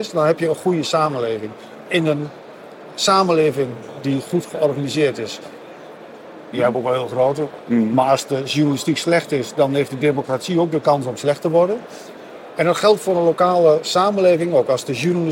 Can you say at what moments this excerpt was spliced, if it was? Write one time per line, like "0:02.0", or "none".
0:01.8
0:06.5
0:07.7

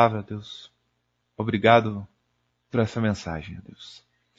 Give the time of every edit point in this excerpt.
none

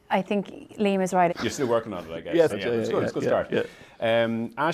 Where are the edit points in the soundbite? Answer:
0:01.3
0:02.5

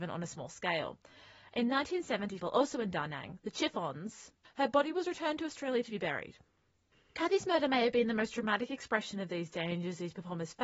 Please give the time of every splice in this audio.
0:02.4
0:04.4

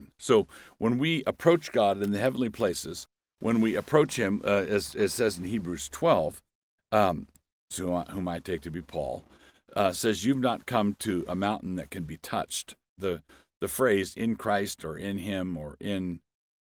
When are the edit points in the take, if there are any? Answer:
0:07.7
0:13.0

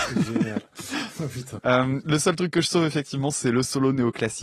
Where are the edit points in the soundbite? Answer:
0:01.6

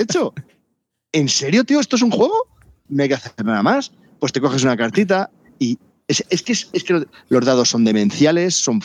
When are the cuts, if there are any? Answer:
0:02.9

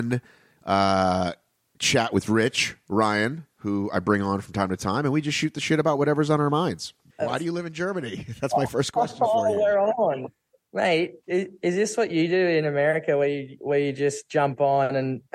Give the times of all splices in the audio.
0:07.2

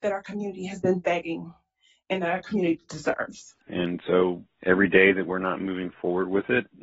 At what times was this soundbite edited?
0:03.6

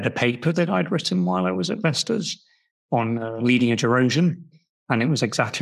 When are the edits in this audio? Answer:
none

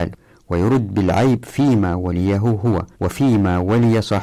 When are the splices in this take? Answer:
0:02.9

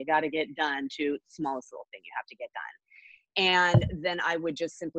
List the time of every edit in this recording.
none

